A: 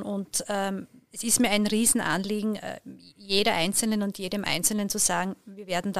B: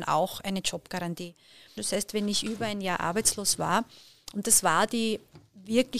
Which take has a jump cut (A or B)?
B